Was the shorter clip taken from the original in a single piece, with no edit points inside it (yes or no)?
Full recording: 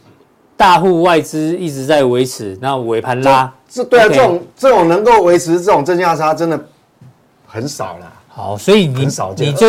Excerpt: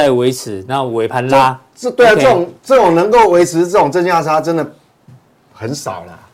yes